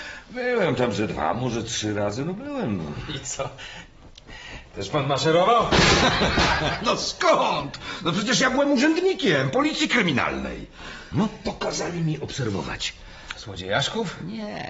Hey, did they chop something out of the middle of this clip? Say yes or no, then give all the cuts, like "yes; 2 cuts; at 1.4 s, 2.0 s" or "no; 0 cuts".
yes; 2 cuts; at 11.1 s, 13.3 s